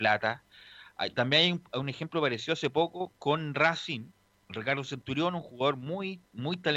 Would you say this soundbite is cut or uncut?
uncut